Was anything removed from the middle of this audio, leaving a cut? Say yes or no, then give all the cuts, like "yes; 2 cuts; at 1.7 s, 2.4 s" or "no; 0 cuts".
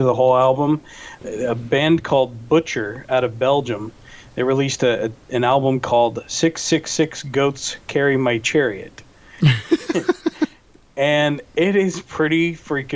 no; 0 cuts